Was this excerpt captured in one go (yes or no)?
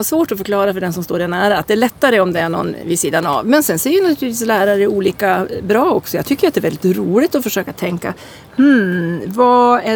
yes